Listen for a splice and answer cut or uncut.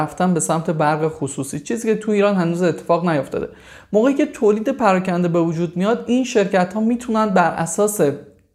uncut